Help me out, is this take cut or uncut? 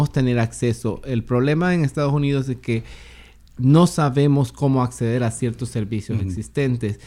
uncut